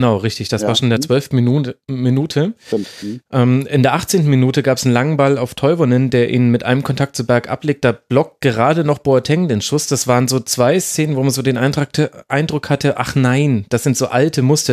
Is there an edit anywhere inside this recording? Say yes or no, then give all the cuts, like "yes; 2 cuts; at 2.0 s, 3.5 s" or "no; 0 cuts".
no; 0 cuts